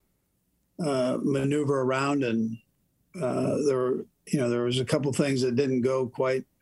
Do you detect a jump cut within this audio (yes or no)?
no